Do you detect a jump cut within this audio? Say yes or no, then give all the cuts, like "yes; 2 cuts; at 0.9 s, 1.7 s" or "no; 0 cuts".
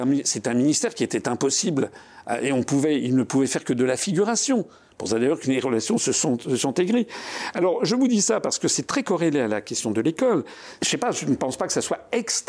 yes; 2 cuts; at 5.4 s, 10.8 s